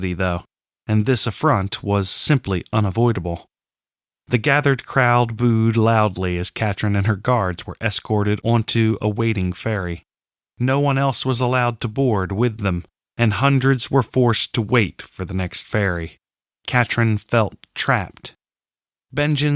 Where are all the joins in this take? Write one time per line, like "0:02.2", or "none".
0:16.5